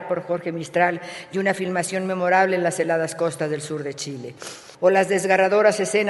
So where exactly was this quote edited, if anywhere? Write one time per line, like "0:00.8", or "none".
0:04.7